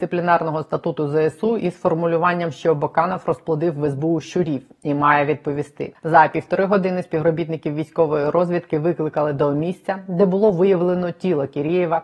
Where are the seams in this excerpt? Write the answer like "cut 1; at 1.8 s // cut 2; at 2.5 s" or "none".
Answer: cut 1; at 5.9 s